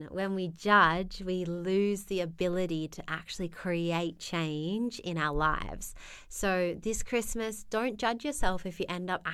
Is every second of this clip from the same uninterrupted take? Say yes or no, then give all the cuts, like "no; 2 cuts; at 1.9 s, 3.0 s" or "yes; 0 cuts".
yes; 0 cuts